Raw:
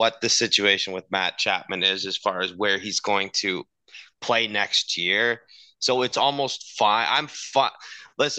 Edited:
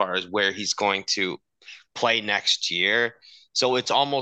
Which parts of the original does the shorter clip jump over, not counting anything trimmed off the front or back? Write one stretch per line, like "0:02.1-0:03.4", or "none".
none

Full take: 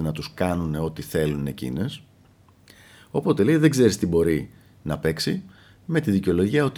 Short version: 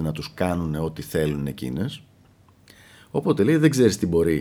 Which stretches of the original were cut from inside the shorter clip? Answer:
none

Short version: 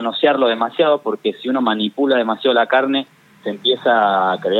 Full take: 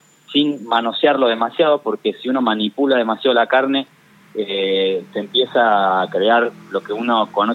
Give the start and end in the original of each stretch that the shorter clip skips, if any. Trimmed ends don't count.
0:04.2-0:05.1

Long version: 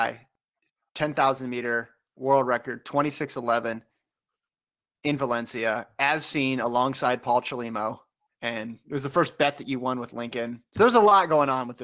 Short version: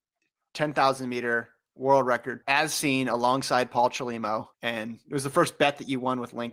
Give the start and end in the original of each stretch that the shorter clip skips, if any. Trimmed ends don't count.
0:02.8-0:05.9
0:08.1-0:08.3

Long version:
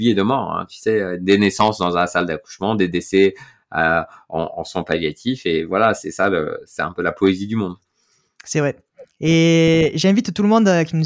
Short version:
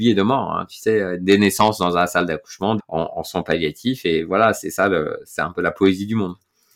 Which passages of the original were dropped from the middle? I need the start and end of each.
0:02.8-0:04.2

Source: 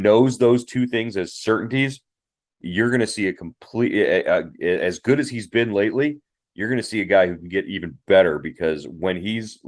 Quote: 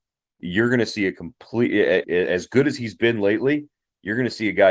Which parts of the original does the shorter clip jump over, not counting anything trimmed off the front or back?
0:04.2-0:04.6

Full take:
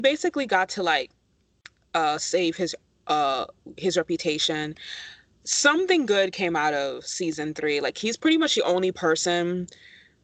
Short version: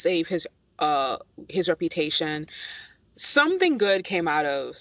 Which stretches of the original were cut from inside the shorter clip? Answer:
none

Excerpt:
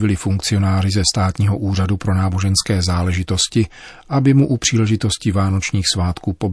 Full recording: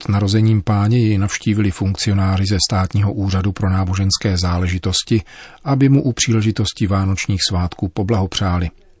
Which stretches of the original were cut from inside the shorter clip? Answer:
none

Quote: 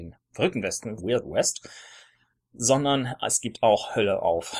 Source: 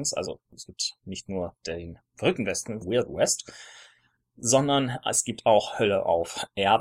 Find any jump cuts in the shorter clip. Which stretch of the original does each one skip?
none

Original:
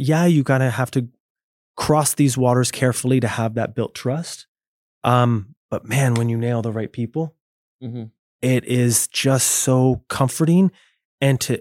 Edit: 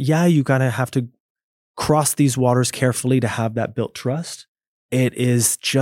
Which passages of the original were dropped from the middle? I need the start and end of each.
0:04.8-0:08.3

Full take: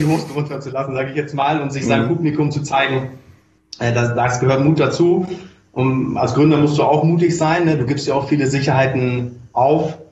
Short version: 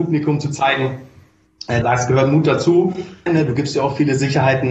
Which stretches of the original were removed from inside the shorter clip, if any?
0:03.9-0:04.1
0:05.6-0:07.6

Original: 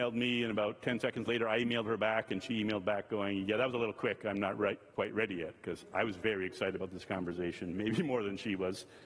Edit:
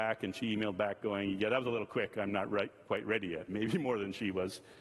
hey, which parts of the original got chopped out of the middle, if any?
0:05.6-0:07.7

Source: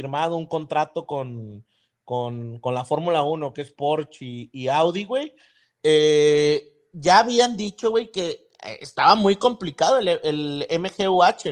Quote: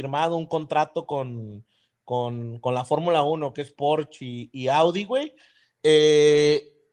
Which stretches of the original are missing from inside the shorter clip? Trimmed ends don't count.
none

